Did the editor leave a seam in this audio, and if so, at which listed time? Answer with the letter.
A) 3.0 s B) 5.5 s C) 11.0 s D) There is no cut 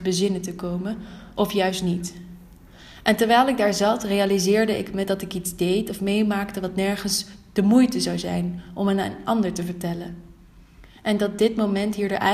D